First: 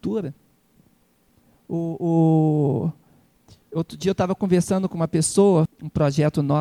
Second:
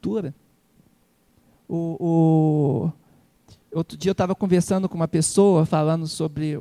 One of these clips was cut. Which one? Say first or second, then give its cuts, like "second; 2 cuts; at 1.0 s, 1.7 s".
first; 1 cut; at 5.7 s